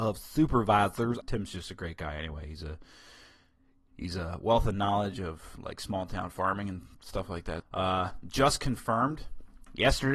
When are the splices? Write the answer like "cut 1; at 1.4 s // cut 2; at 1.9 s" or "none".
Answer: cut 1; at 1.2 s // cut 2; at 7.6 s